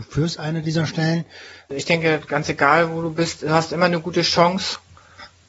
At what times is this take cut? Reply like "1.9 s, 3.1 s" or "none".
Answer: none